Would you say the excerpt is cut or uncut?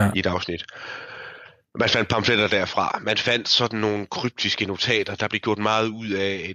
uncut